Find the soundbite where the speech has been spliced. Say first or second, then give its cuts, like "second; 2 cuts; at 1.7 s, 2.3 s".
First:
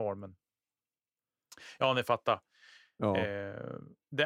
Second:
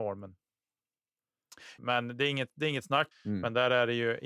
second; 2 cuts; at 1.8 s, 3.1 s